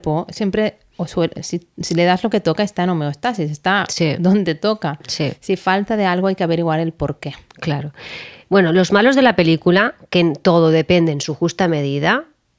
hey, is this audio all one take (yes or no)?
yes